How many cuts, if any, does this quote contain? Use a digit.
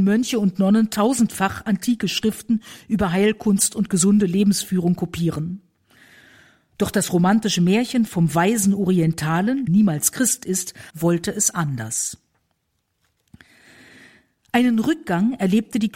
2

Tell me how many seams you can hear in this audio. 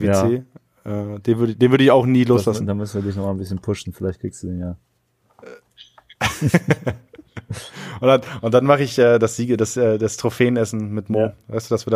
0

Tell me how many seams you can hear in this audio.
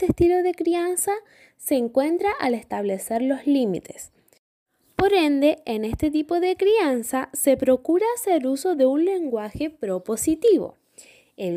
0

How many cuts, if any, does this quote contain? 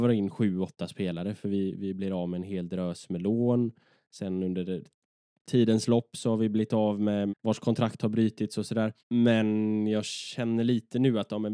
2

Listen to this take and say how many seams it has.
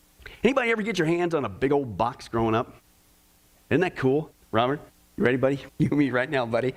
2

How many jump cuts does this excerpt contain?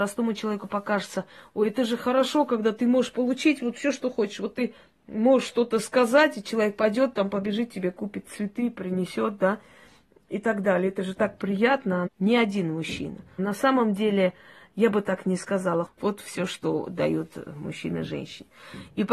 3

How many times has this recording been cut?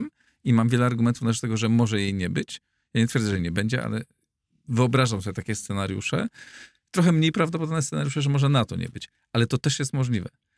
0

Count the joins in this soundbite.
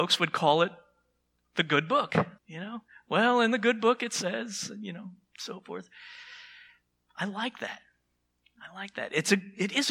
1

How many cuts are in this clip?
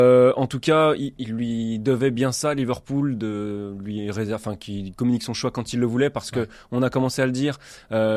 1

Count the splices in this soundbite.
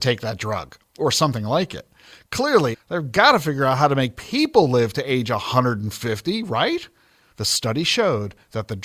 2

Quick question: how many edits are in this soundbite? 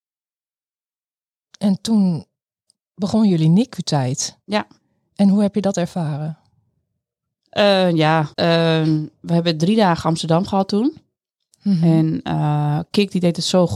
1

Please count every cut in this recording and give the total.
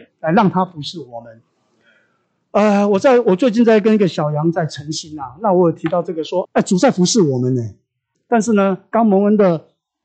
2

